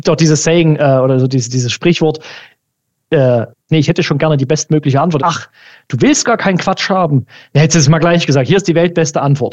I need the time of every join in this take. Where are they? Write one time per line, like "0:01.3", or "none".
0:03.7
0:05.2